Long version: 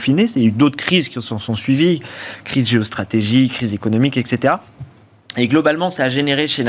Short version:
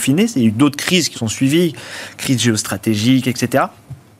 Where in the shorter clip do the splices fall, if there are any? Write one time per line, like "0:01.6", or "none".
0:01.1
0:03.2

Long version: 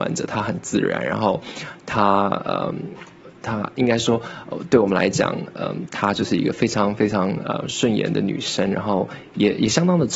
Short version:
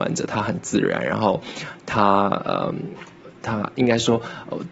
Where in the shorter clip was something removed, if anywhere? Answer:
none

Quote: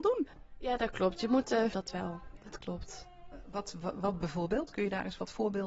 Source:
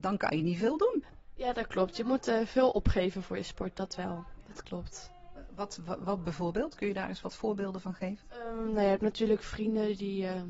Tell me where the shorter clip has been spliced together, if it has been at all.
0:01.7

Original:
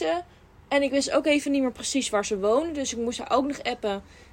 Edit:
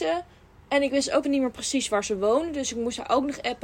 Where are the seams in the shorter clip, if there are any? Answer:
0:01.2

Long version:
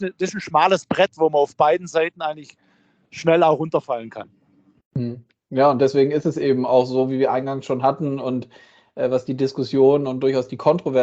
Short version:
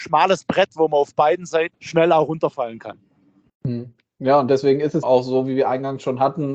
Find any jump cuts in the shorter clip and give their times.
0:01.7
0:05.0

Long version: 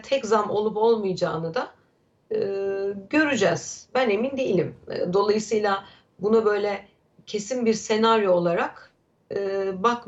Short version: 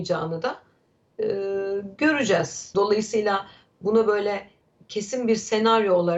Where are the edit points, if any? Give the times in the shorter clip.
0:02.7

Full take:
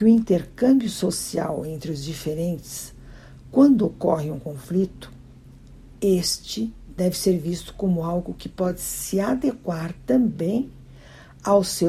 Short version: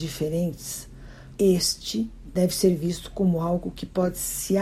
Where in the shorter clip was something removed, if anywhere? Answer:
0:01.3

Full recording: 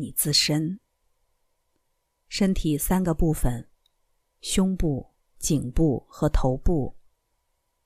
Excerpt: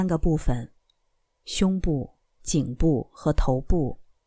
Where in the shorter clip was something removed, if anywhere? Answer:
none

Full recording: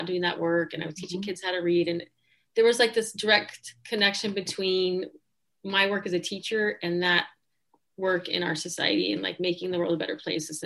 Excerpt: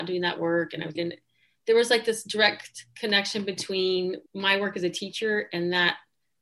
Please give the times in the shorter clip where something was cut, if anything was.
0:01.0
0:04.3

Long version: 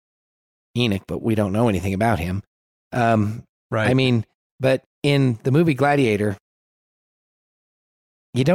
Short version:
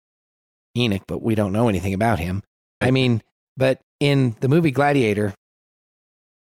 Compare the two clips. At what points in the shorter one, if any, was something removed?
0:02.8

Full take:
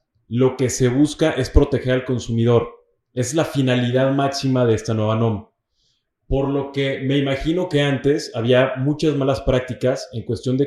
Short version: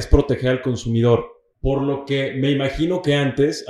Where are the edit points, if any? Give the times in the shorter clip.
0:01.5

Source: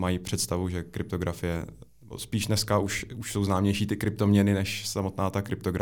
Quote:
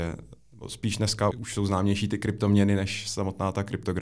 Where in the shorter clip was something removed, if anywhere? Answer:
0:01.3

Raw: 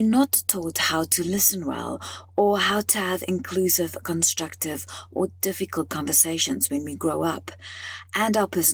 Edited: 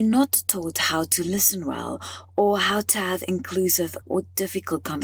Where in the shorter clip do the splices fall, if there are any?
0:04.0

